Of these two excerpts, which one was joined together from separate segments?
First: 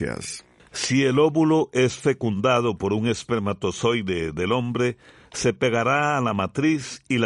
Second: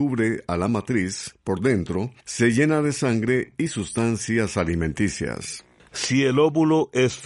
second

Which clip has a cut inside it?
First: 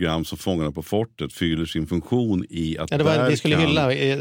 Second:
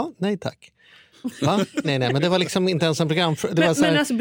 second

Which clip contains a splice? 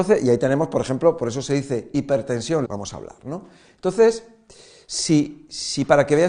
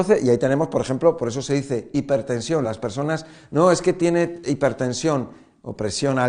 first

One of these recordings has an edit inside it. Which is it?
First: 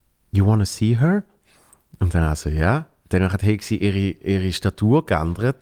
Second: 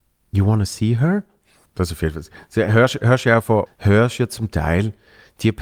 second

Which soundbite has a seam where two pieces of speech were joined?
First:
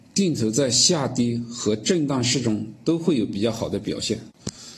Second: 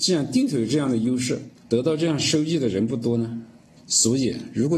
second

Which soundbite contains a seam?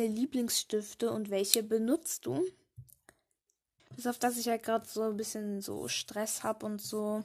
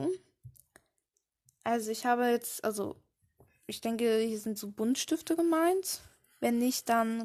first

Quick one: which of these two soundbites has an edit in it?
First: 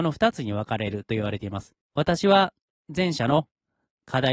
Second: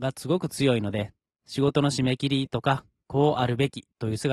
first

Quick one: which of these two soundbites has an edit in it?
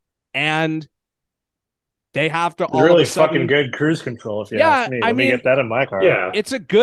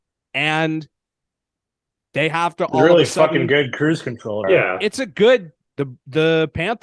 second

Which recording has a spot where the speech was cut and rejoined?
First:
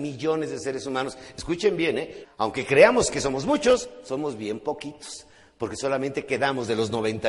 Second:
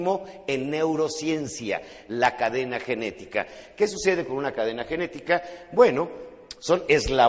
first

